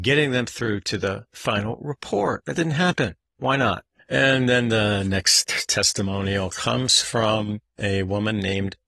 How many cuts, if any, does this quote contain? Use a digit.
1